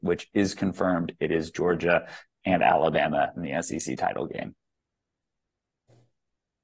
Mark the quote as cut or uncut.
cut